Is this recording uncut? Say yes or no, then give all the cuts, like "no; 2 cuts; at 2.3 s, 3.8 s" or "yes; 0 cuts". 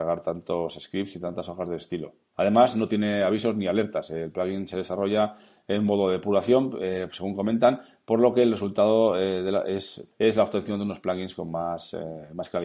yes; 0 cuts